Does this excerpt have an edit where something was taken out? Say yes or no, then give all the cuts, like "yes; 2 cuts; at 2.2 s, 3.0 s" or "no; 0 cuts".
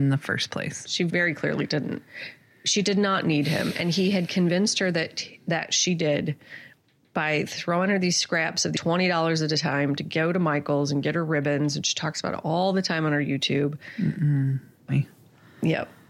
yes; 1 cut; at 14.9 s